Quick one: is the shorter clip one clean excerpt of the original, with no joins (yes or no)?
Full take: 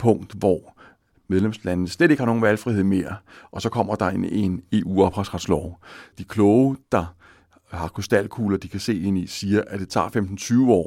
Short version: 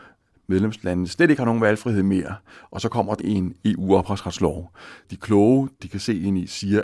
no